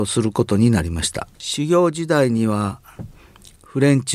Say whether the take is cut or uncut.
cut